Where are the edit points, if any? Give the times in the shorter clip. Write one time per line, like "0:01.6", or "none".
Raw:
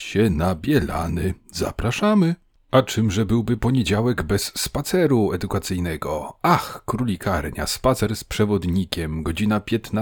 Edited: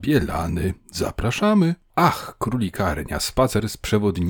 0:01.9